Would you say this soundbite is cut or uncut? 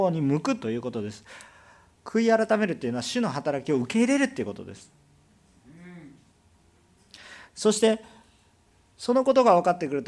uncut